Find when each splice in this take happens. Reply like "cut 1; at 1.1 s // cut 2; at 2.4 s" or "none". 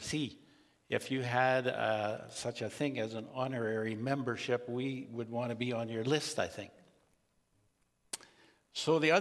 none

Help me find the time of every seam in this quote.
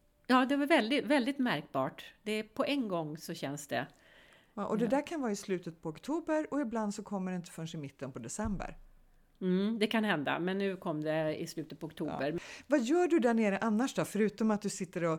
none

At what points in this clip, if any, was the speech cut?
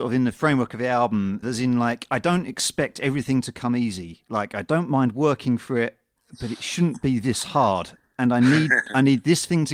cut 1; at 1.4 s

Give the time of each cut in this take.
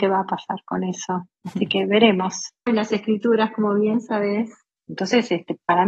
cut 1; at 2.7 s // cut 2; at 4.8 s

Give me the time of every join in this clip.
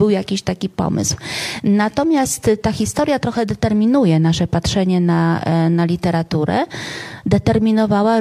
none

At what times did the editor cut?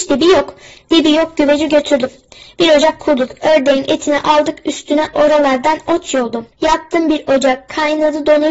cut 1; at 6.5 s

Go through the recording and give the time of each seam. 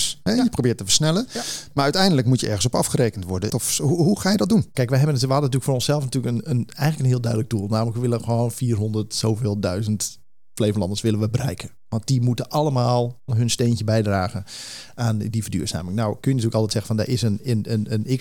cut 1; at 3.5 s // cut 2; at 4.7 s // cut 3; at 13.3 s

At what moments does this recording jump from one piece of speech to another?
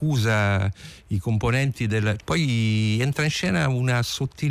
cut 1; at 2.2 s

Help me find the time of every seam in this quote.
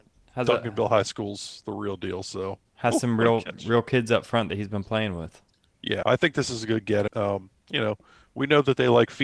cut 1; at 6.0 s // cut 2; at 7.1 s

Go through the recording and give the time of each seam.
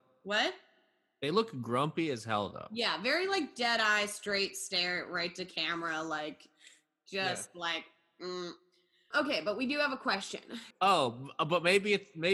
cut 1; at 9.1 s // cut 2; at 10.7 s

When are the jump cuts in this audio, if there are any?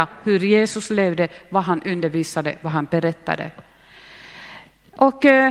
none

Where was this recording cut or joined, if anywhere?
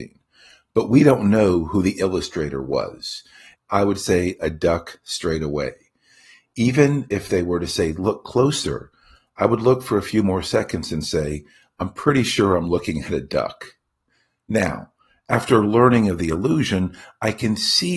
cut 1; at 3.5 s

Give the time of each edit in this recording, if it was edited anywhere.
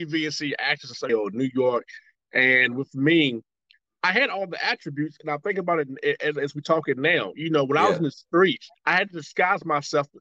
cut 1; at 1.1 s // cut 2; at 8.8 s

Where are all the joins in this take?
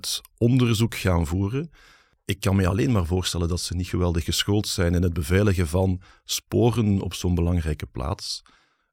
none

